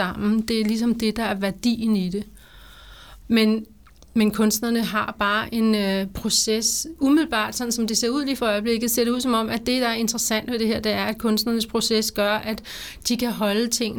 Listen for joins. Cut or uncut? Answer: cut